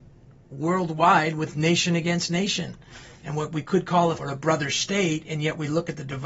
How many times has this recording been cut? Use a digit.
1